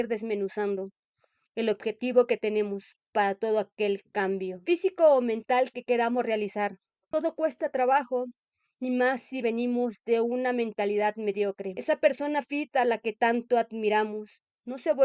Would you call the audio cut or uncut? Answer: cut